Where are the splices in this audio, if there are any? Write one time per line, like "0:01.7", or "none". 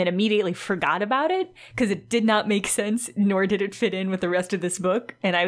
none

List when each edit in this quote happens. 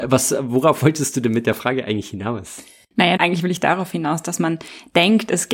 0:03.2

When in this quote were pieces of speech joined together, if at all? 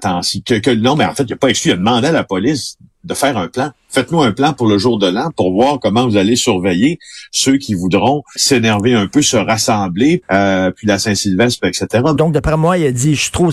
0:08.4
0:10.2
0:12.2

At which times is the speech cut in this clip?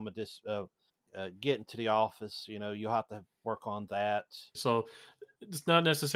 0:04.5

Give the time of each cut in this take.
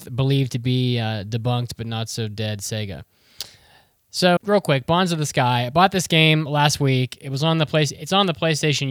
0:04.4

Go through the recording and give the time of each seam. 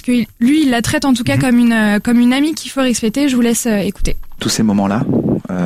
none

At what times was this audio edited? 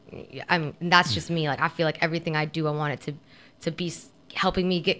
none

